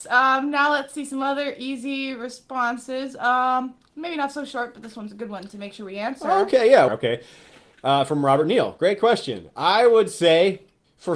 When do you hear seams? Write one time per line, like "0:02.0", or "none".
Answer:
0:06.9

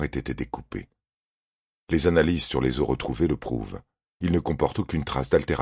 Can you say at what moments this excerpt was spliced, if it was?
none

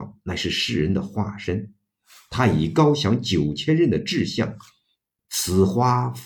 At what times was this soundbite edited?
0:05.2

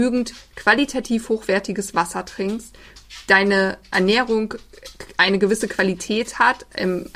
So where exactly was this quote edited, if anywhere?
none

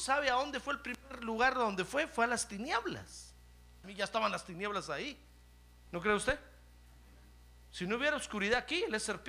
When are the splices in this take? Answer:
0:03.8
0:05.9

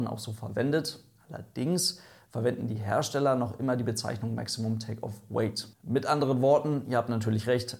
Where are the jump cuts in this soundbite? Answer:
none

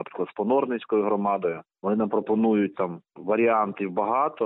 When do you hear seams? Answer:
none

